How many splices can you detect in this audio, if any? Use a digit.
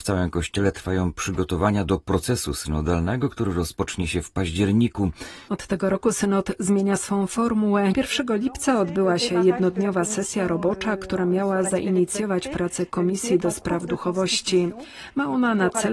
2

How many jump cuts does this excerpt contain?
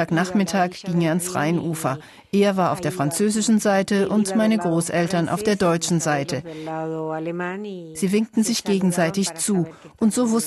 0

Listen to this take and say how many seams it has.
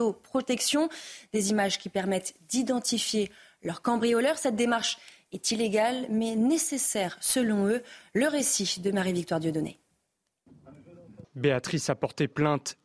1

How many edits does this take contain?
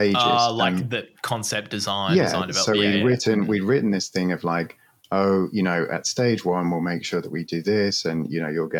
0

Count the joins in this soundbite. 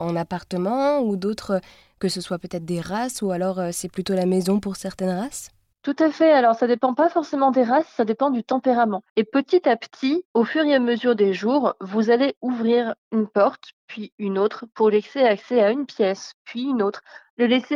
1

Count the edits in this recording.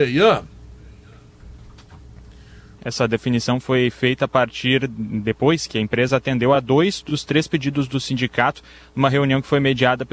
1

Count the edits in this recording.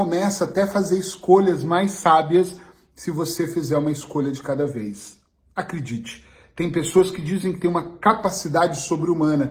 0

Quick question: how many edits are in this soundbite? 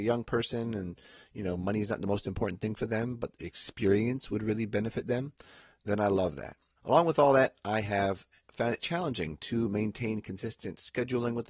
1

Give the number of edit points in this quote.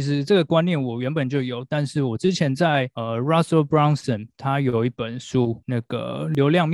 0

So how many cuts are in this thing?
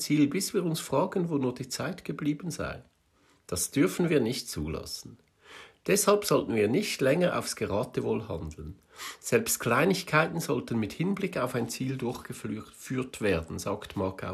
0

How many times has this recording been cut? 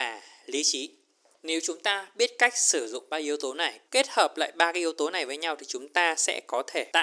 1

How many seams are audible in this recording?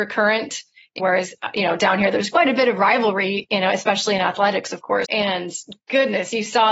2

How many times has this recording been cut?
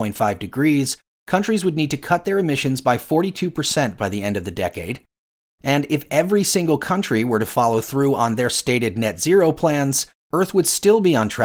1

